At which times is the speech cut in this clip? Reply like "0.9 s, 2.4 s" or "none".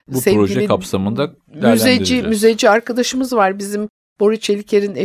none